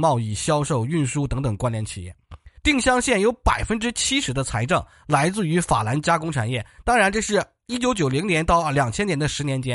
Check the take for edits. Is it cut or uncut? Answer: cut